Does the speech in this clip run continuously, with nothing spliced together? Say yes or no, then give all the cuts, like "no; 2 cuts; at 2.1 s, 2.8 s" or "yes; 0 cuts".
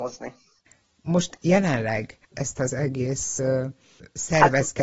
yes; 0 cuts